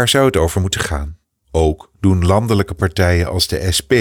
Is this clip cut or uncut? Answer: cut